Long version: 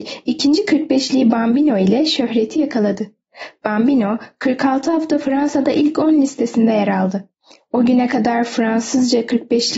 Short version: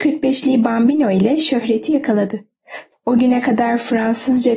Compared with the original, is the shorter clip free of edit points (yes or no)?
no